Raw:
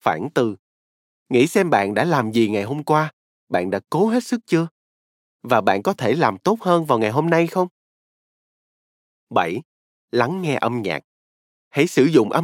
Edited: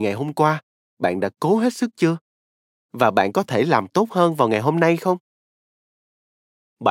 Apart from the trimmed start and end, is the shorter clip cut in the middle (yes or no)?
no